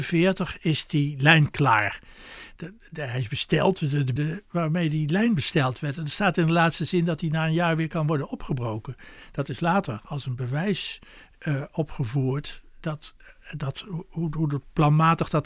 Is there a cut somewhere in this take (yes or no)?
yes